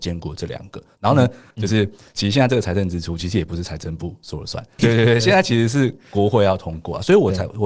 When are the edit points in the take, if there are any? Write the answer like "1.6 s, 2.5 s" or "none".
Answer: 1.5 s, 4.8 s